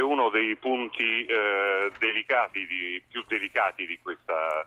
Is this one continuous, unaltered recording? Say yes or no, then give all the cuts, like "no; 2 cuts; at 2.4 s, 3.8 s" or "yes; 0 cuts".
yes; 0 cuts